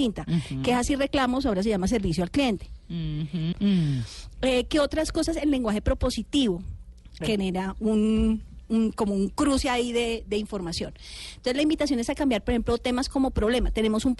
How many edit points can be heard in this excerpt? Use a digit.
2